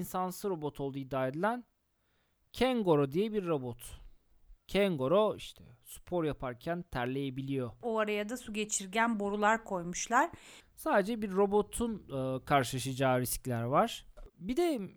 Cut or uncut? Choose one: cut